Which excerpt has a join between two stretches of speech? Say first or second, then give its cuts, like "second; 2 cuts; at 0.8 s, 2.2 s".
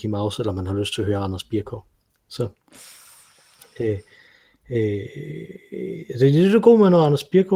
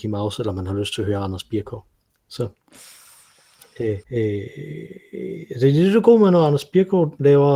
second; 1 cut; at 4.0 s